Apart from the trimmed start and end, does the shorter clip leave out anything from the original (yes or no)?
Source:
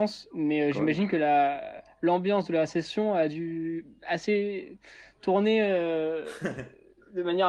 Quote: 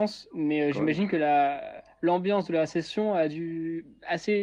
no